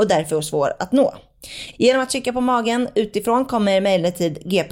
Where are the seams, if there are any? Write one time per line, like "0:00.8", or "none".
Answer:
0:01.7